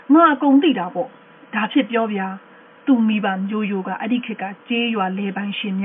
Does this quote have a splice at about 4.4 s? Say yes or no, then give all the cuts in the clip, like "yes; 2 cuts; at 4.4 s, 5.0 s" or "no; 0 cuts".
no; 0 cuts